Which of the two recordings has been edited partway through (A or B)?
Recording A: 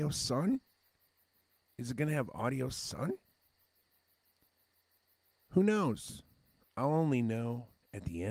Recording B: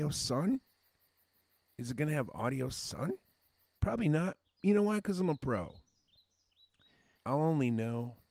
B